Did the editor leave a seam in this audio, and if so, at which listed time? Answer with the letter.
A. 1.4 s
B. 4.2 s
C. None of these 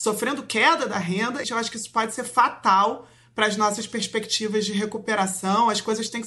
A